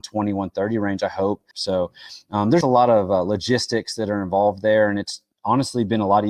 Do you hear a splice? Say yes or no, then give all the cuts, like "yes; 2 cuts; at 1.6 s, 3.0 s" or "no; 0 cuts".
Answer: yes; 2 cuts; at 1.5 s, 2.6 s